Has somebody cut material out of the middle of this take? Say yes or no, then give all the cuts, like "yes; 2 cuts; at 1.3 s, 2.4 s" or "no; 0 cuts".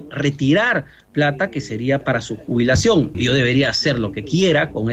yes; 1 cut; at 3.1 s